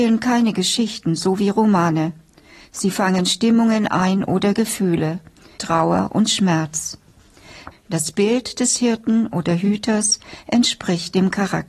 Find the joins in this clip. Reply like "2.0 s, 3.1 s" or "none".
5.6 s, 7.7 s